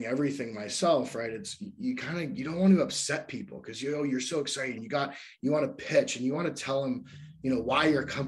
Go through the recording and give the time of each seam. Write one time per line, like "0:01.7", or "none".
0:04.8